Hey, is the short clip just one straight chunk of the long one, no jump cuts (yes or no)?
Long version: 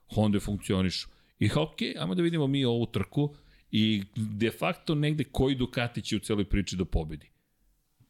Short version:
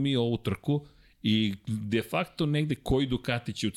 yes